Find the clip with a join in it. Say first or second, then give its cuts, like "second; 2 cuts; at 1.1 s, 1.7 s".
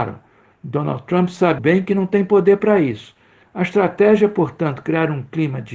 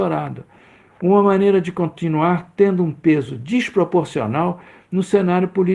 first; 2 cuts; at 1.6 s, 3.4 s